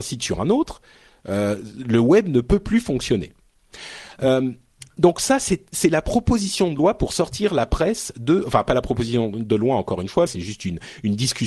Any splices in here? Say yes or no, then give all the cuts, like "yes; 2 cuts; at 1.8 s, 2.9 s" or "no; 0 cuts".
yes; 1 cut; at 10.3 s